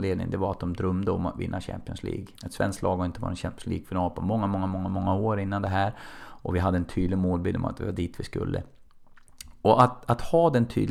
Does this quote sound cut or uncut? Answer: cut